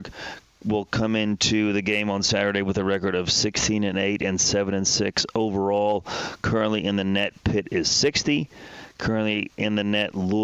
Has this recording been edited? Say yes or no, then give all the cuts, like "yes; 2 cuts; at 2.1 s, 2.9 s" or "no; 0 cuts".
no; 0 cuts